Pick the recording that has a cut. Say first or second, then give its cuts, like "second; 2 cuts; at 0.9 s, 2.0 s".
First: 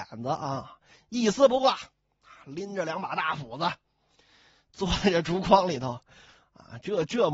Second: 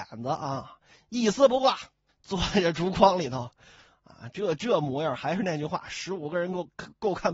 second; 1 cut; at 2.1 s